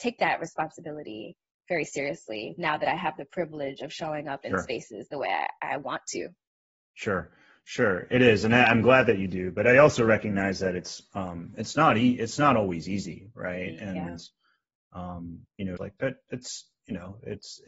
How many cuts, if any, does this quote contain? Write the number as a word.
one